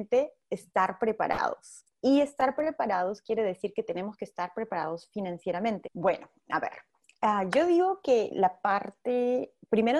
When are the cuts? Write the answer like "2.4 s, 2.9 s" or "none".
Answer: 5.8 s